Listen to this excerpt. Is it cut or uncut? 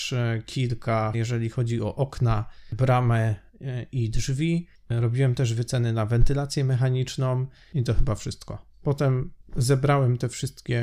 cut